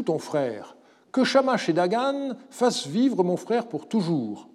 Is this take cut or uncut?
uncut